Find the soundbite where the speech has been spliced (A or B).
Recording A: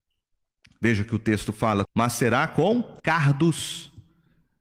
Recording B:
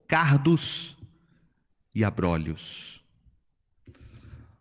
A